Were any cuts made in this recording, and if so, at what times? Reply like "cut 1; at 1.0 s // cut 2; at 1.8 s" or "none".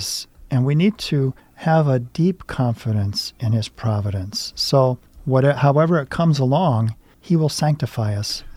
none